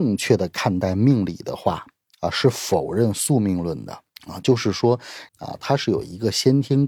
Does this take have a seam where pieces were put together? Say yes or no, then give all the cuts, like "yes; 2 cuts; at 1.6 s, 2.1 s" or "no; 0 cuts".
yes; 2 cuts; at 4.1 s, 5.3 s